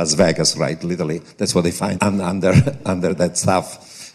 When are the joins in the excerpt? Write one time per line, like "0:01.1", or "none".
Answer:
0:01.9

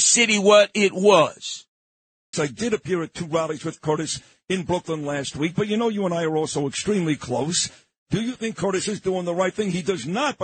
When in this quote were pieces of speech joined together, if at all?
0:02.3

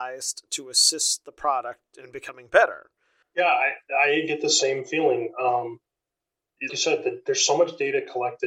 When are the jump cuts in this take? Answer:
0:03.2
0:06.7

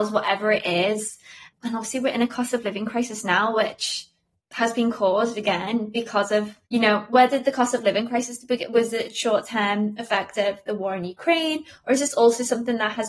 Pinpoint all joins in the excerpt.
0:06.6

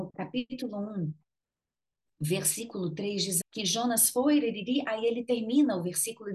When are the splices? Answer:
0:03.4

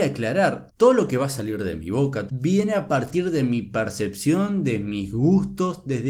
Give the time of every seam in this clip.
0:02.3

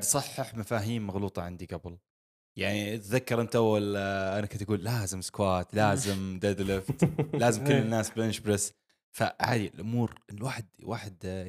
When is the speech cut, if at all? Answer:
none

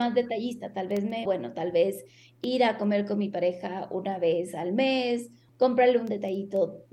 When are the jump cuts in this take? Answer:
0:01.3
0:05.5

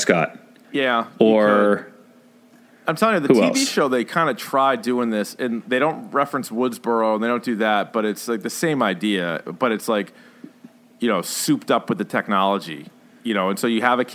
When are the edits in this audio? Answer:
none

